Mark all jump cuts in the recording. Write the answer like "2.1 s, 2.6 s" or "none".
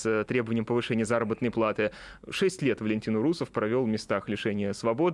none